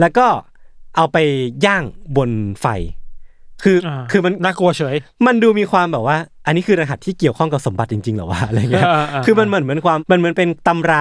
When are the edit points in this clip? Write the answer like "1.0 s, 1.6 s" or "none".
3.8 s, 10.0 s